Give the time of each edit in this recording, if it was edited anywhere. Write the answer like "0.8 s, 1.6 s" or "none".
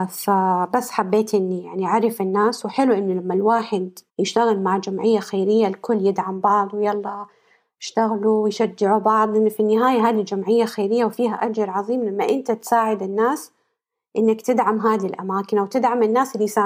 4.1 s